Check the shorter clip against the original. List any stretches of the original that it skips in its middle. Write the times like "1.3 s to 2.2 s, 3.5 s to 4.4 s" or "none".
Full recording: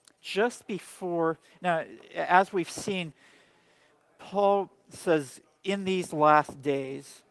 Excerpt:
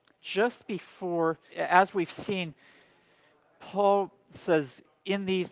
1.5 s to 2.1 s